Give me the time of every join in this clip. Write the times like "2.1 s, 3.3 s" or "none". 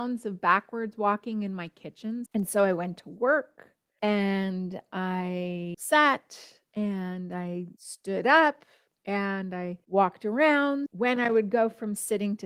2.3 s